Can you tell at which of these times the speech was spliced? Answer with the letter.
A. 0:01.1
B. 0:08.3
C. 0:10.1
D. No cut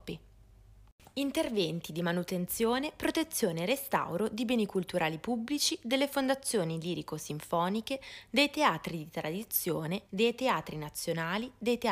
C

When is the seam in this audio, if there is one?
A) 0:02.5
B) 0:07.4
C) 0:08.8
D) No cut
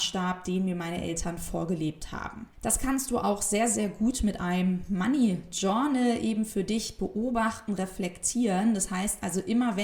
A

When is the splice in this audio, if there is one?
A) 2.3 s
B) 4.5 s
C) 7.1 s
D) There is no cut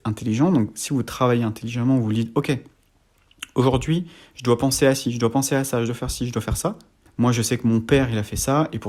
C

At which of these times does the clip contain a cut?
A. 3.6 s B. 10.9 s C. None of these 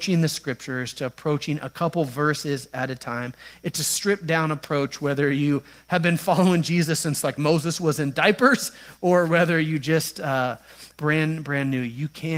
B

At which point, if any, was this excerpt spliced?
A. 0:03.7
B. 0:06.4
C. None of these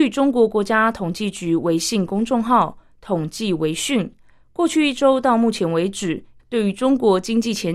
B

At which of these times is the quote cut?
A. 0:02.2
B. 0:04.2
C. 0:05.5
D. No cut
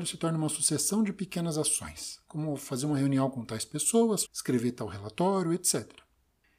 B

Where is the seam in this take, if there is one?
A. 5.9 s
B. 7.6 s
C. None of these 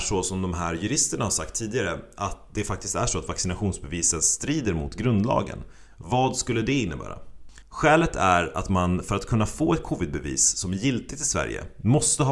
B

